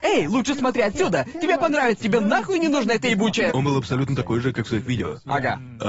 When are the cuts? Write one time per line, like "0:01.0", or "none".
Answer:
0:02.0
0:03.5